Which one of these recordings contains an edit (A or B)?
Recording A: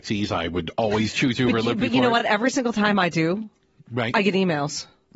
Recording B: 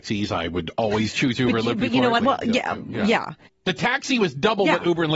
B